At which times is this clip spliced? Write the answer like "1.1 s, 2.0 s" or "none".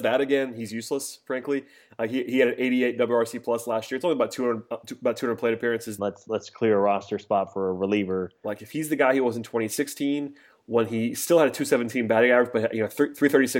6.0 s, 8.4 s